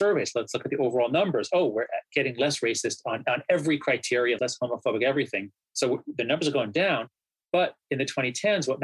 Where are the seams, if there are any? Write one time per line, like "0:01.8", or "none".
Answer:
0:04.4